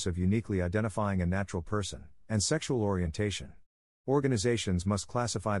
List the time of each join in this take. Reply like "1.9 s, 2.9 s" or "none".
2.2 s